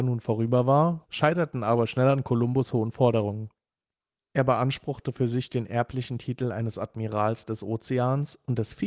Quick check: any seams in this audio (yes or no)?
yes